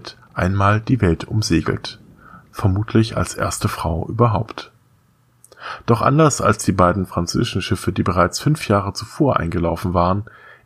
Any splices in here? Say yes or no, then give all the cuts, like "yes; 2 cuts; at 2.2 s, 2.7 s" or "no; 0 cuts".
no; 0 cuts